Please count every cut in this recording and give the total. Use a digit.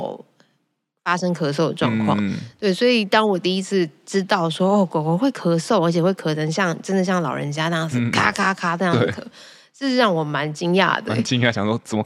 0